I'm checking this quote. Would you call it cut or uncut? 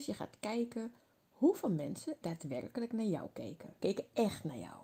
cut